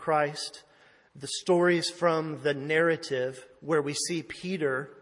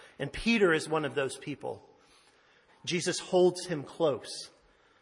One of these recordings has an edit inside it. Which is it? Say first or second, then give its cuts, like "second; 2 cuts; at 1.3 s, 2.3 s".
second; 1 cut; at 2.7 s